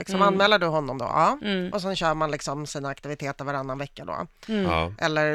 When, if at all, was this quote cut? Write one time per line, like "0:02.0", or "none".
none